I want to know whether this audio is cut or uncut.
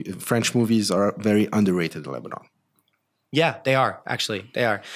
uncut